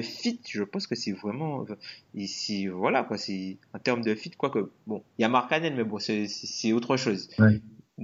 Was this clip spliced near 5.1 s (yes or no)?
no